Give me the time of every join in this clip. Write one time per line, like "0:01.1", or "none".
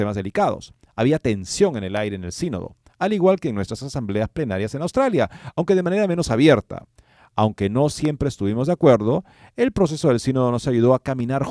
none

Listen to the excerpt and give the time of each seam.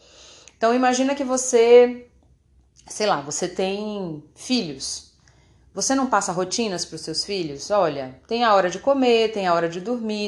none

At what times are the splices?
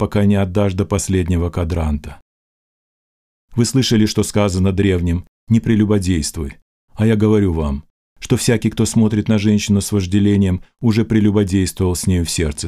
none

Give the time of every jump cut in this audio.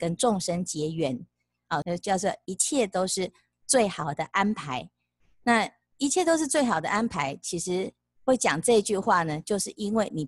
0:01.8

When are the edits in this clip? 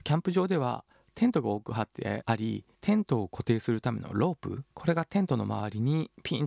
0:02.7
0:04.7

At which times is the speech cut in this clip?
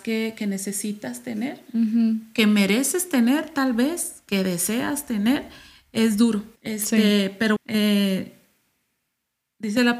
0:06.6
0:07.6

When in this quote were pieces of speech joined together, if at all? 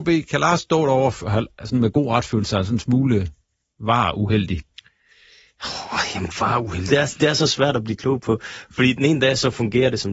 0:06.9

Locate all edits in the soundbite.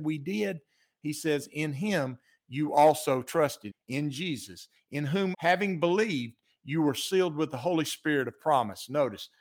0:03.7
0:05.3

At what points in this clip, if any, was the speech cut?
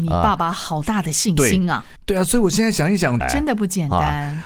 0:02.0
0:03.2

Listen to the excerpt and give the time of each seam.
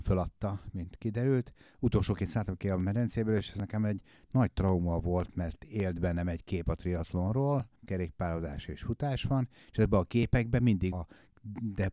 0:07.8
0:10.9

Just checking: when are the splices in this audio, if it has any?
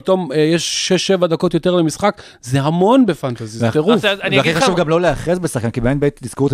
none

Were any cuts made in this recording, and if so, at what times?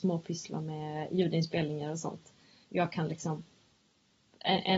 0:02.6

